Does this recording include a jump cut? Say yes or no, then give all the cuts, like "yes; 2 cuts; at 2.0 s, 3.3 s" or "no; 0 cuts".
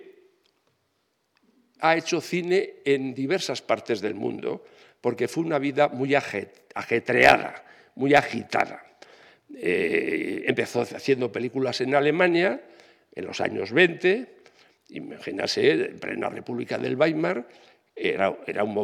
no; 0 cuts